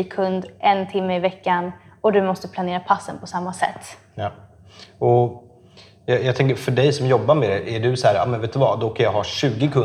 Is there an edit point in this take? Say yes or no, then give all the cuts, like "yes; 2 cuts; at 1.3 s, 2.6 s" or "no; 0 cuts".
no; 0 cuts